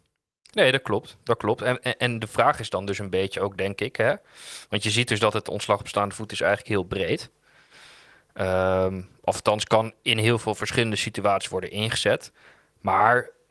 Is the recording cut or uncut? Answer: uncut